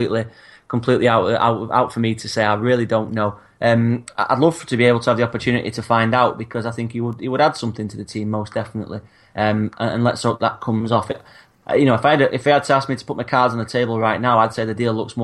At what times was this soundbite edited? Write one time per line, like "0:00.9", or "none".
none